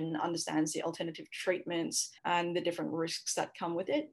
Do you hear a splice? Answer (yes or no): yes